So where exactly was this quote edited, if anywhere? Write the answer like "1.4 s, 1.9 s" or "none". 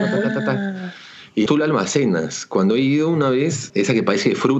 1.5 s, 3.7 s